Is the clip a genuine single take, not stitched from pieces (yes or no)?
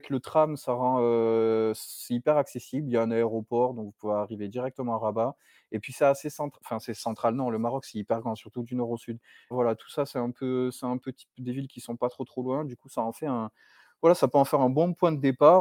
no